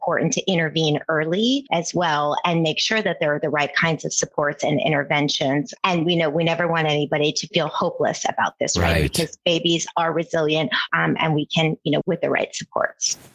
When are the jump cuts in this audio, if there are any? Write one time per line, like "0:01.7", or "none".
0:10.9
0:12.0